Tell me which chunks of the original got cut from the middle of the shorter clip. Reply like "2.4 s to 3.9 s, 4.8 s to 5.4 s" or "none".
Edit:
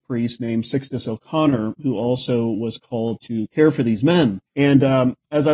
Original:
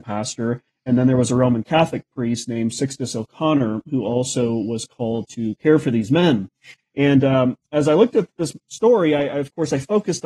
6.5 s to 6.9 s

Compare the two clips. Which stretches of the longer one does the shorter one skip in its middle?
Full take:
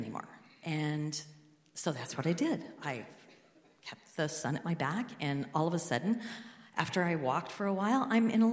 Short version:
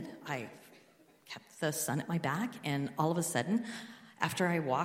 none

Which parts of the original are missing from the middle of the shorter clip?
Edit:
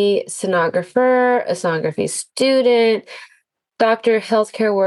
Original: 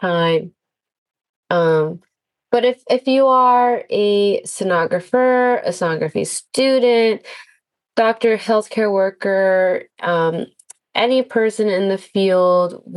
none

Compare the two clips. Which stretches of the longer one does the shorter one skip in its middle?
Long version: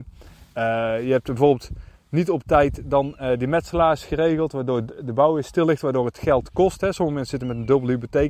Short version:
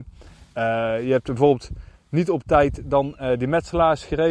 none

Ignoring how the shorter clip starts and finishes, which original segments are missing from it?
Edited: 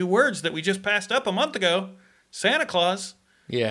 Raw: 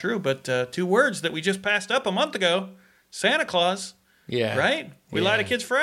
none

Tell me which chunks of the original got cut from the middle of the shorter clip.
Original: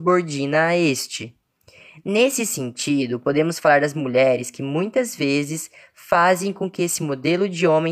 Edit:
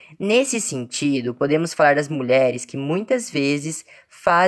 none

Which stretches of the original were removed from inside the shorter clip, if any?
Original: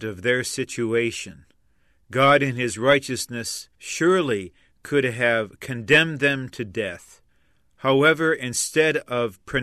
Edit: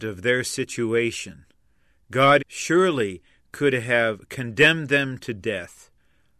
2.4 s to 3.7 s

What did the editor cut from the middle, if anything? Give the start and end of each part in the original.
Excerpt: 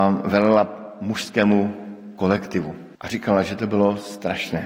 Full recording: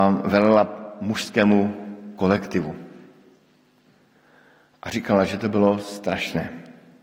2.9 s to 4.8 s

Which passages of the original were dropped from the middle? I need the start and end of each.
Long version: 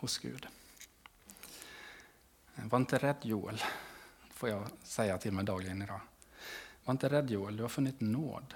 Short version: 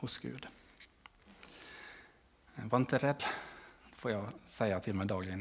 3.2 s to 3.6 s

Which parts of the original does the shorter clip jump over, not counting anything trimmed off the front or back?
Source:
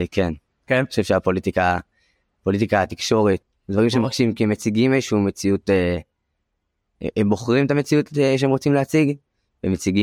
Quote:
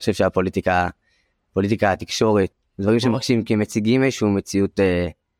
none

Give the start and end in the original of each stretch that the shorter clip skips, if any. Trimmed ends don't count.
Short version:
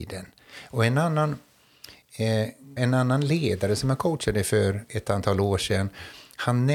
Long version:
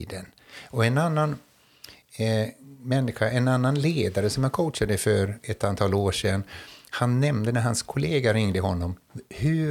2.8 s to 3.3 s

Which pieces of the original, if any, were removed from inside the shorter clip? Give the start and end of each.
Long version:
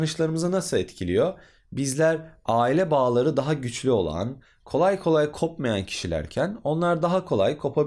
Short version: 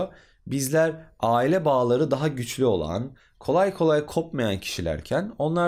none

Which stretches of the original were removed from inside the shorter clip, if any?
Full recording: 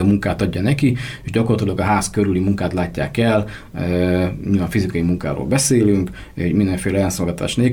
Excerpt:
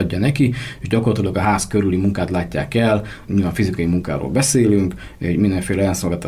3.7 s to 4.4 s

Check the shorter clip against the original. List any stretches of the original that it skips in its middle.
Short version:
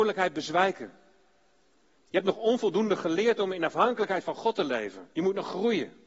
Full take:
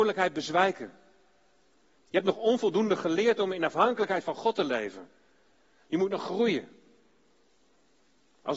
5.1 s to 5.9 s

